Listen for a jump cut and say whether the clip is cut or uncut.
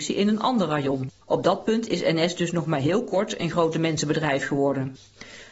cut